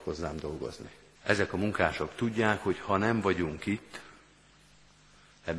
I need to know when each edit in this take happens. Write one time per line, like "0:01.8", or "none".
0:01.2